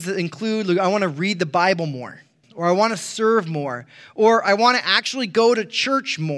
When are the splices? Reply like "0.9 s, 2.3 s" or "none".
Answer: 2.4 s